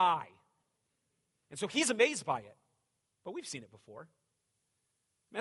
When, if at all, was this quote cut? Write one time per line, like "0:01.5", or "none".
none